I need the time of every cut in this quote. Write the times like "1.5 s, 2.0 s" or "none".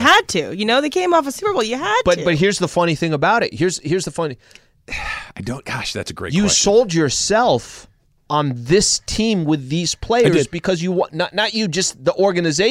none